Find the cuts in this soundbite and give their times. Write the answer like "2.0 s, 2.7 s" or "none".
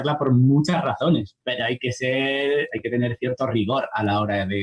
1.4 s